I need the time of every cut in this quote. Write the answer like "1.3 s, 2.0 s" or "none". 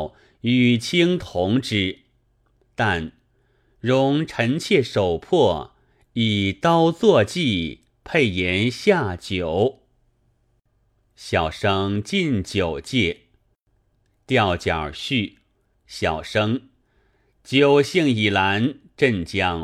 15.7 s